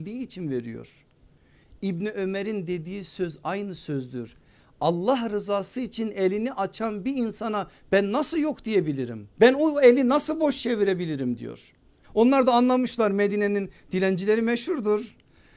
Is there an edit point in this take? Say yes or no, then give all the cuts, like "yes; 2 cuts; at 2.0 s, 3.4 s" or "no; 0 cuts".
yes; 2 cuts; at 9.3 s, 12.0 s